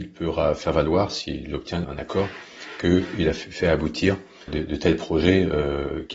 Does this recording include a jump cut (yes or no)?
yes